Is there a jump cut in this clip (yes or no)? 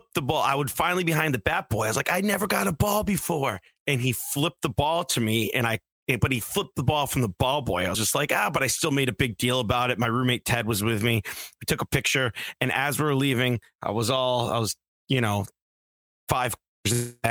no